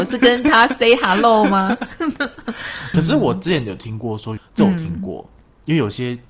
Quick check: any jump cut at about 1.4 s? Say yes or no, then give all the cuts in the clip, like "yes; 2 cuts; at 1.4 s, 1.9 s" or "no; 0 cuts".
no; 2 cuts; at 2.9 s, 4.4 s